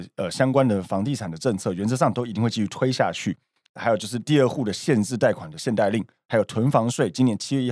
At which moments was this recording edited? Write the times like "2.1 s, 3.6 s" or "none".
3.6 s